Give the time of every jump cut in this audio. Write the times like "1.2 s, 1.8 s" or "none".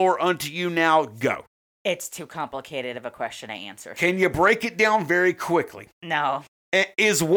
none